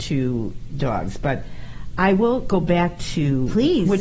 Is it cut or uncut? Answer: uncut